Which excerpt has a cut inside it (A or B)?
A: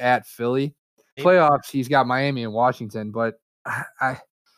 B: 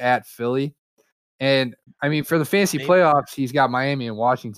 A